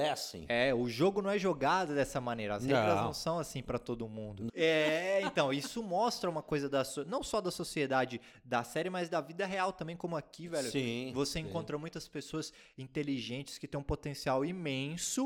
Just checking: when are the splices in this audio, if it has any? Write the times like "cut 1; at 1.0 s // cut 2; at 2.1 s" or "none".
cut 1; at 4.5 s